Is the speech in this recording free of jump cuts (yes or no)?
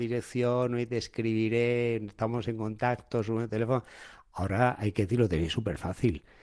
yes